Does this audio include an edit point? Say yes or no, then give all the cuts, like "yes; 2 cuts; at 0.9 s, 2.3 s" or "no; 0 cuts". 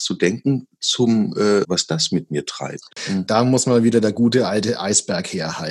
yes; 1 cut; at 1.6 s